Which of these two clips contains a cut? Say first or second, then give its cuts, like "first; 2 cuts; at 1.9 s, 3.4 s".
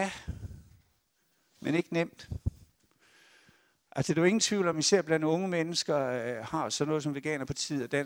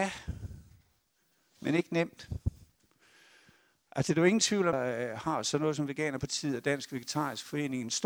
second; 1 cut; at 4.7 s